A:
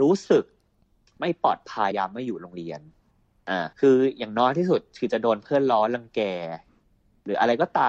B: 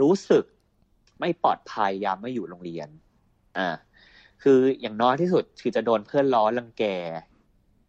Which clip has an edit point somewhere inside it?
A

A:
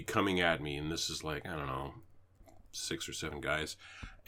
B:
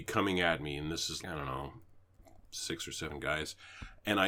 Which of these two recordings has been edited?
B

